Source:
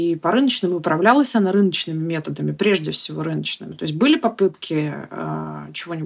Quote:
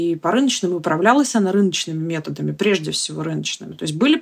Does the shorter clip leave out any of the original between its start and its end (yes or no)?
no